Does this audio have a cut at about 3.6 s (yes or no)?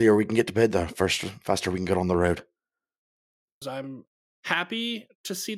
yes